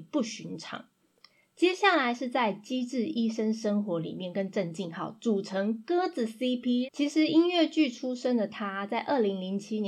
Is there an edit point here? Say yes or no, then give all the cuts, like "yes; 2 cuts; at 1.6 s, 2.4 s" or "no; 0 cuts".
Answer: yes; 1 cut; at 6.8 s